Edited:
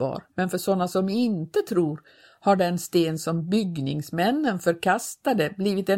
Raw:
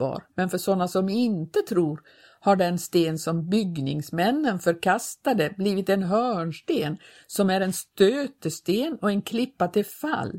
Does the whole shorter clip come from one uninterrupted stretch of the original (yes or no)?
yes